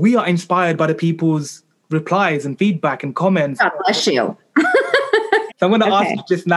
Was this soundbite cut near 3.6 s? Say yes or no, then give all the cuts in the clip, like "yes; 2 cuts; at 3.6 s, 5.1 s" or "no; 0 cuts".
yes; 2 cuts; at 3.6 s, 5.5 s